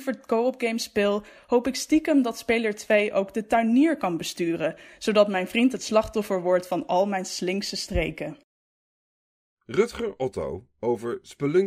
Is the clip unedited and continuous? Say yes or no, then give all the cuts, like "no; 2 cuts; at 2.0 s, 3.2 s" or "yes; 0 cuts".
yes; 0 cuts